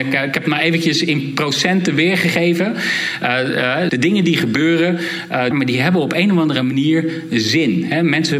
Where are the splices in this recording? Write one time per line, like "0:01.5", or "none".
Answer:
0:03.9
0:05.5